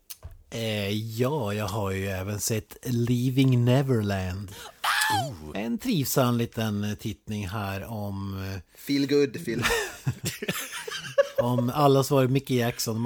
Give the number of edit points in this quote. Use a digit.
1